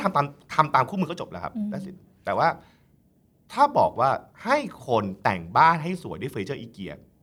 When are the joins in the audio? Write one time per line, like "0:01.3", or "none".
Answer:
0:04.3